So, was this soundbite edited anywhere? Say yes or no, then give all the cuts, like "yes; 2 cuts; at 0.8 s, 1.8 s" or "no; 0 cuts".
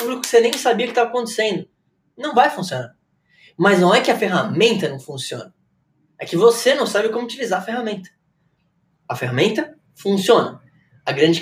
no; 0 cuts